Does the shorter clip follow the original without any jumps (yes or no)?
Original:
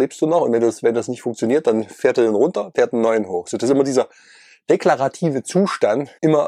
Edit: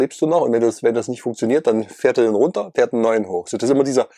yes